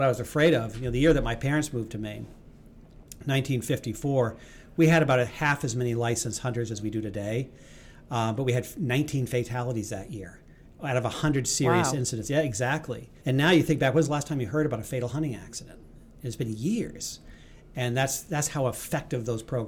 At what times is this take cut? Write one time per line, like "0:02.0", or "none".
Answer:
0:13.2